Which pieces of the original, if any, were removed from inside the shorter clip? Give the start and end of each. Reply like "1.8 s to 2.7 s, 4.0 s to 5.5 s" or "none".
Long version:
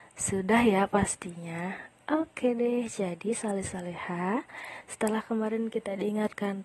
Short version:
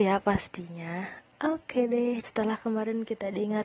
2.9 s to 4.9 s